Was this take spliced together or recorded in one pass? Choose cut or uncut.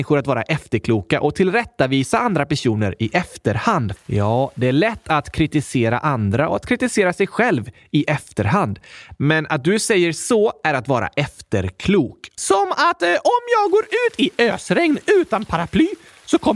cut